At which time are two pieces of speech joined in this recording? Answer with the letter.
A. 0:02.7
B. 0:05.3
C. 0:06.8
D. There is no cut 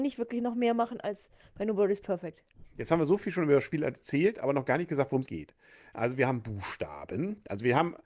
B